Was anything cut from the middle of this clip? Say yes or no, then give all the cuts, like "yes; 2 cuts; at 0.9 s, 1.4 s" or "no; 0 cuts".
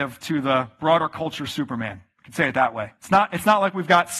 yes; 1 cut; at 3.0 s